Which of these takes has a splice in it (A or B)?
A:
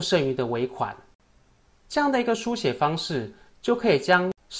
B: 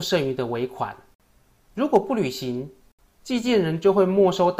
A